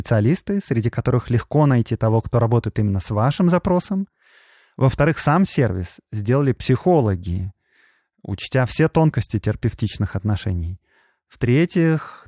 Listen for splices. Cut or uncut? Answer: uncut